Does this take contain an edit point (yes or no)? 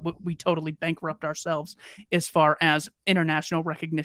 no